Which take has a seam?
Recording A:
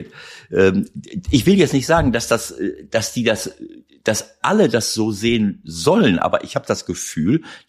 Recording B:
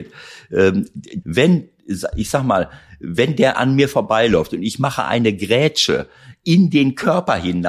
B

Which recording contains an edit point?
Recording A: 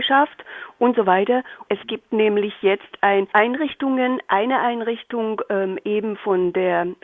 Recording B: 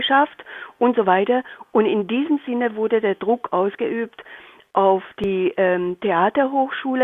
A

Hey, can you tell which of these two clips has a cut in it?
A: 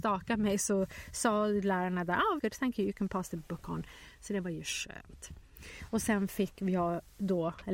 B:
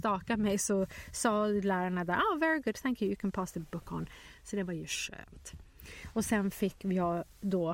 A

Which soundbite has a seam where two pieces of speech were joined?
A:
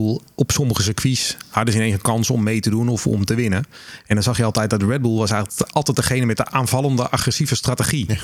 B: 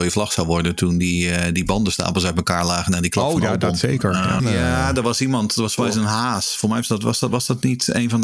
B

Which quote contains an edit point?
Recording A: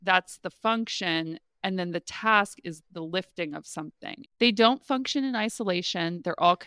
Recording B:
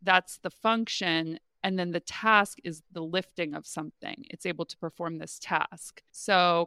A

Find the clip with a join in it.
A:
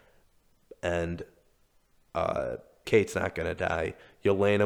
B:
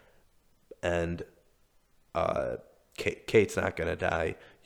A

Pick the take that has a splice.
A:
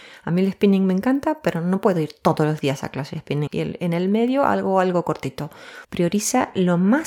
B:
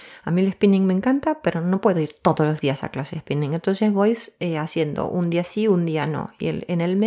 A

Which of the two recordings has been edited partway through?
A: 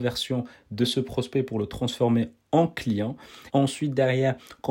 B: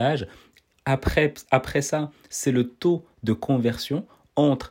A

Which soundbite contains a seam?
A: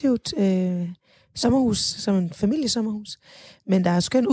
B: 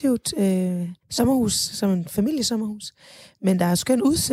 B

